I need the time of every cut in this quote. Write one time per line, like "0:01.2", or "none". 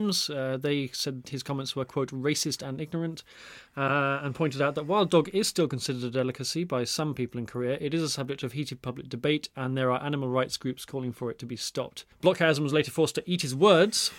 none